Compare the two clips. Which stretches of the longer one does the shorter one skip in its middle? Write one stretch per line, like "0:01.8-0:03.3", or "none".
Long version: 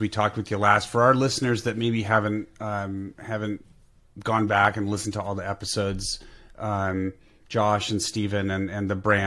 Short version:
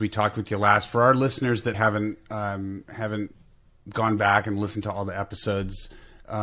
0:01.7-0:02.0